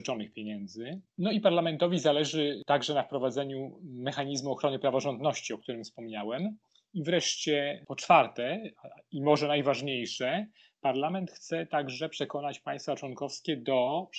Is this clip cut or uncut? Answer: uncut